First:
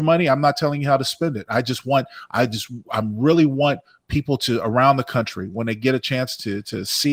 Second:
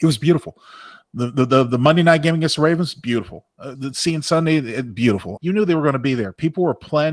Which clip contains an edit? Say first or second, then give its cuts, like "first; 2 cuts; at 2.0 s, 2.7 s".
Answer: second; 2 cuts; at 3.7 s, 5.4 s